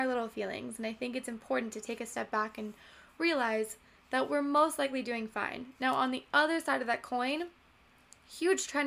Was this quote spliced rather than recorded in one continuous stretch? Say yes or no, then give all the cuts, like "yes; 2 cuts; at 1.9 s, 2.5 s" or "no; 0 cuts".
no; 0 cuts